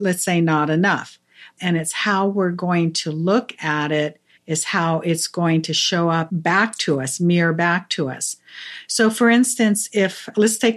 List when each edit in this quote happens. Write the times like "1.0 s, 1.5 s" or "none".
1.6 s, 4.4 s